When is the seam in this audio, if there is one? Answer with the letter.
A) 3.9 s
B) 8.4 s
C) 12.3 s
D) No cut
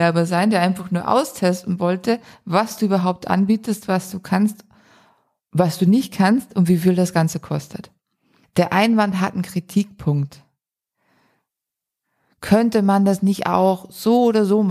B